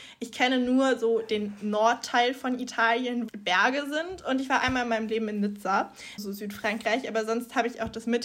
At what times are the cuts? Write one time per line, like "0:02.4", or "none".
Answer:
0:03.3
0:06.2